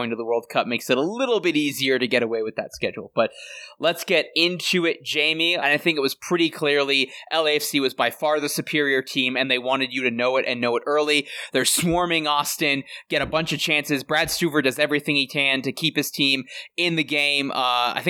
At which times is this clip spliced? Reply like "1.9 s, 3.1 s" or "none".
5.6 s